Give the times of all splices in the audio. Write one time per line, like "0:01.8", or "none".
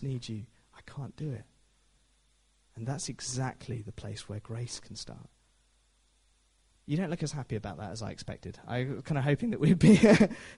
none